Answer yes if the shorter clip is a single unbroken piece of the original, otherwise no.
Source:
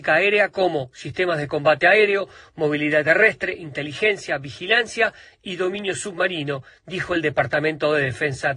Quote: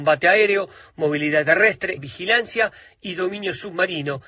no